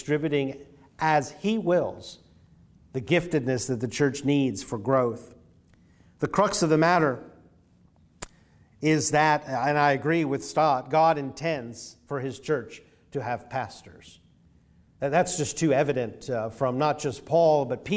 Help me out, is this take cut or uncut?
uncut